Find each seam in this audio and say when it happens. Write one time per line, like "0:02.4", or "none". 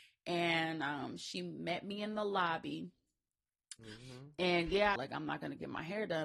0:03.8
0:05.0